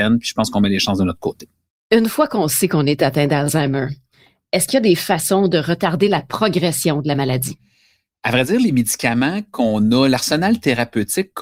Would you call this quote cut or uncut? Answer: uncut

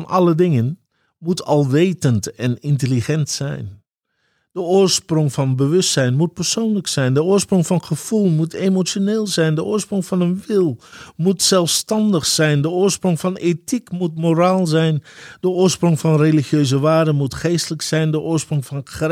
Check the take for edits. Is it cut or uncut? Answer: uncut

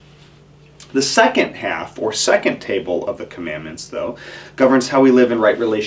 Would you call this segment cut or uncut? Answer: uncut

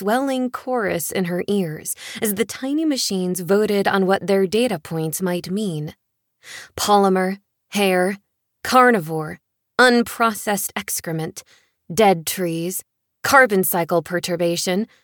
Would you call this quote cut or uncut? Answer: uncut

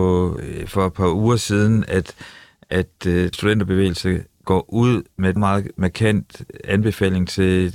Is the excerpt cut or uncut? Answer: cut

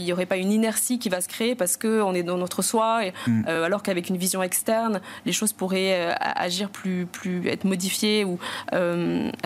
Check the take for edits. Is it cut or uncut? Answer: uncut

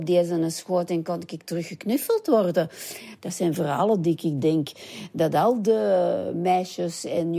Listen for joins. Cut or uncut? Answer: uncut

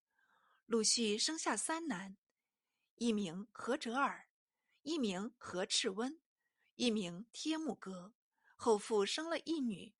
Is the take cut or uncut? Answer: uncut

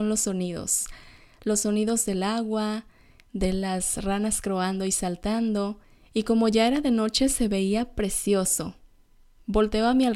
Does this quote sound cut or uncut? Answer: uncut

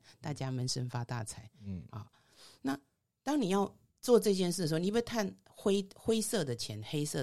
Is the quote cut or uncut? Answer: uncut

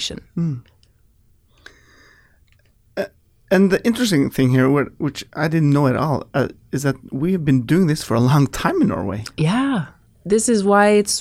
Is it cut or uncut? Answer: uncut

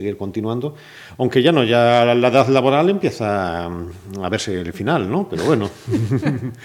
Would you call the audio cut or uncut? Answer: uncut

